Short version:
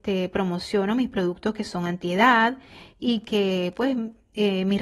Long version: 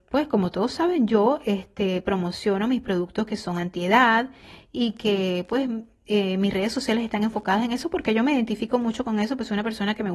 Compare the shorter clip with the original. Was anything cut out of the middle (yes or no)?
no